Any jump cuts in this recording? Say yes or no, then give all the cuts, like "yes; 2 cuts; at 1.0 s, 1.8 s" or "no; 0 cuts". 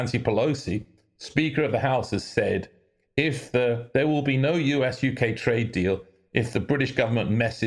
no; 0 cuts